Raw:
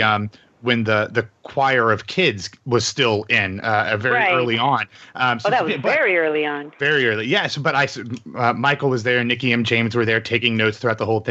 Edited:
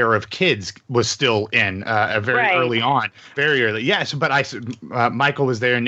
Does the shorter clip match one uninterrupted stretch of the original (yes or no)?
no